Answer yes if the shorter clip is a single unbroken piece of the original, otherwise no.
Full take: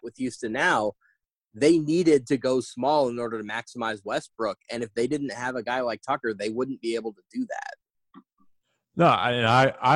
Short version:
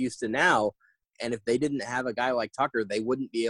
no